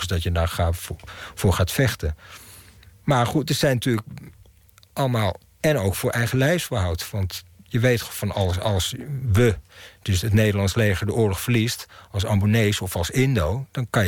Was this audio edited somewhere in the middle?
yes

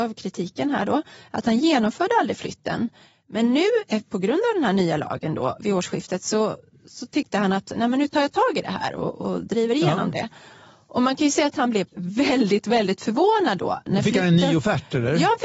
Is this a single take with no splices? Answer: yes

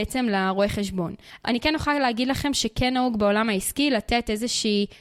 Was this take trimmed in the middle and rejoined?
no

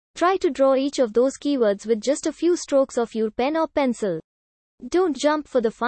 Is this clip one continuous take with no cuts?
yes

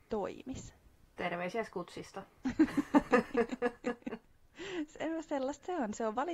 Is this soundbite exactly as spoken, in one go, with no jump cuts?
yes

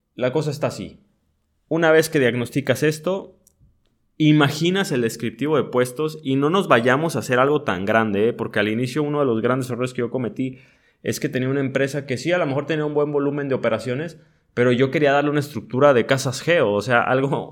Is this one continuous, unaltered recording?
yes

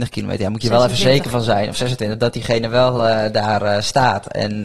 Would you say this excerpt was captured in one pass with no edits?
yes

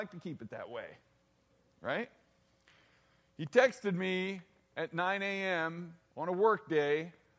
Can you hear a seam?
no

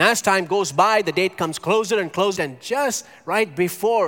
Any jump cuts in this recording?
yes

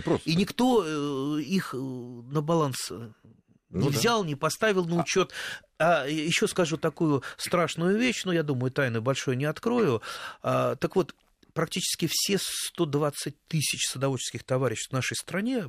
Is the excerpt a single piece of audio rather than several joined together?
yes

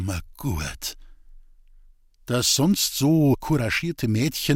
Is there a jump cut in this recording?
no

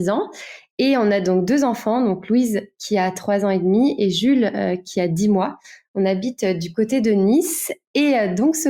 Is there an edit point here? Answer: no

